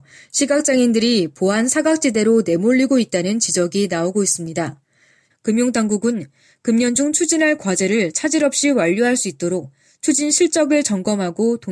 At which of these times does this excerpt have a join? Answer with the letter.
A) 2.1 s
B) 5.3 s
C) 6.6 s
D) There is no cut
B